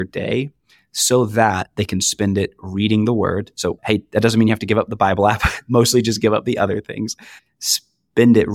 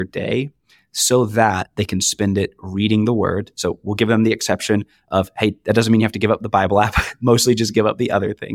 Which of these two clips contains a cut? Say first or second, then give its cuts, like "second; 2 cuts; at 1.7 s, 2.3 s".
first; 1 cut; at 3.8 s